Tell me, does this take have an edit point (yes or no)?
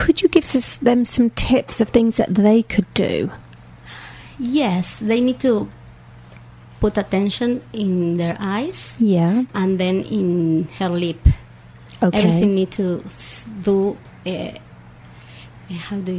yes